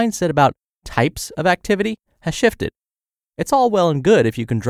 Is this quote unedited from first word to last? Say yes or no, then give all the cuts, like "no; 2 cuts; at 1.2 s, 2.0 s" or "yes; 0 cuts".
no; 1 cut; at 3.2 s